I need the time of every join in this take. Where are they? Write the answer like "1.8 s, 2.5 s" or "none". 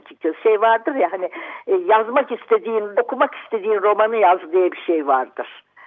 2.9 s